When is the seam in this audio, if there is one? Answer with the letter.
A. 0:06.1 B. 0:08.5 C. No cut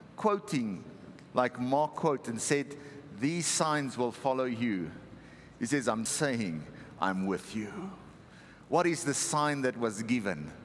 A